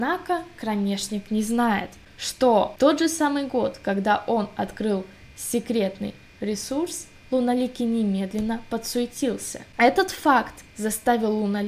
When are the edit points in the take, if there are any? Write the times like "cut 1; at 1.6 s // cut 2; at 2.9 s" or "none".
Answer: none